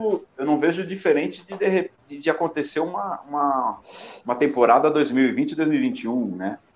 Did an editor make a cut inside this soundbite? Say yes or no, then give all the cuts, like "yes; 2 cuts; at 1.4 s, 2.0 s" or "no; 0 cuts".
no; 0 cuts